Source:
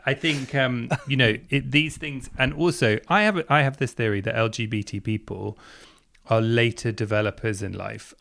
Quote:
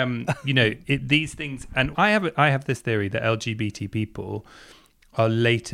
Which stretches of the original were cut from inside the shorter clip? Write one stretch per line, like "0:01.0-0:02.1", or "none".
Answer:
0:02.5-0:03.0